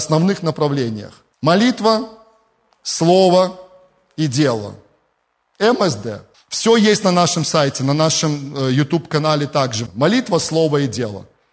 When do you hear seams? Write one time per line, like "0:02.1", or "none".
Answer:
0:01.3
0:06.3
0:09.9